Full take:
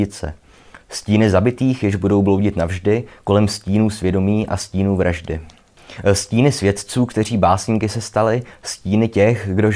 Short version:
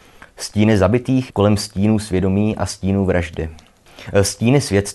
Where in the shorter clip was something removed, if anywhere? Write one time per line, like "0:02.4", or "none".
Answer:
0:01.3